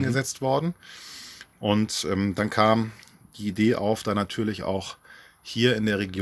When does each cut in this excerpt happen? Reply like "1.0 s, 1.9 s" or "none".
none